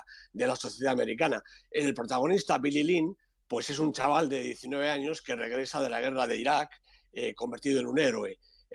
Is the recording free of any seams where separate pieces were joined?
yes; 0 cuts

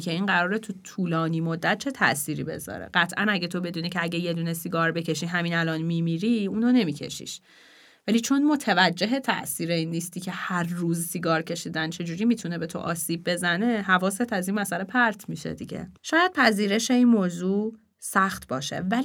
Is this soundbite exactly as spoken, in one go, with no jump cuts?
yes; 0 cuts

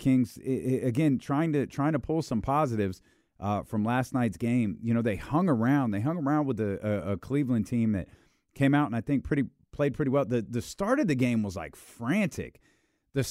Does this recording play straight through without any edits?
yes; 0 cuts

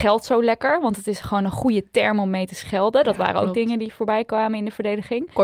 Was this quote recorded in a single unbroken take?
yes; 0 cuts

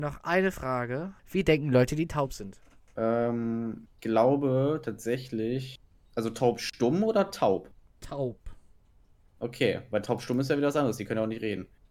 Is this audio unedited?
no; 1 cut; at 4.0 s

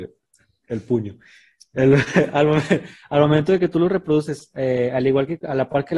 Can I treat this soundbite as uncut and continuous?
yes; 0 cuts

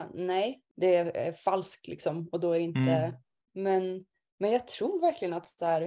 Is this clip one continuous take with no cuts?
no; 1 cut; at 3.5 s

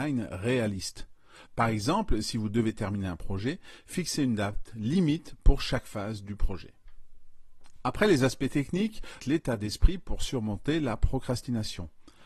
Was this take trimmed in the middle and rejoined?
yes; 2 cuts; at 1.4 s, 9.2 s

